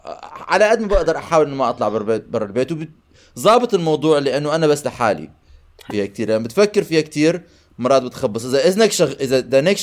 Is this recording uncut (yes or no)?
no